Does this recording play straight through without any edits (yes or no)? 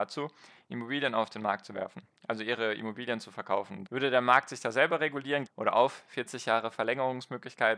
no